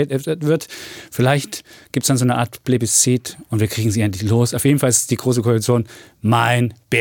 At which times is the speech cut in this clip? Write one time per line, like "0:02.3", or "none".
none